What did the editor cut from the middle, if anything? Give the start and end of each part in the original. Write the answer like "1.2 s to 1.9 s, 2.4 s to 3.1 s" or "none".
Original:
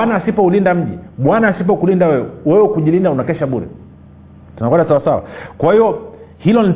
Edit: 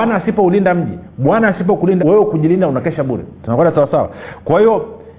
2.0 s to 2.4 s, 3.8 s to 4.5 s